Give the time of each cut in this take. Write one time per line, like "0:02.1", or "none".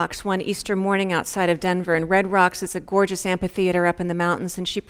none